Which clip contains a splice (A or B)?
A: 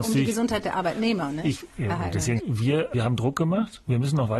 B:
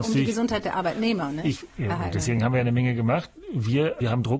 A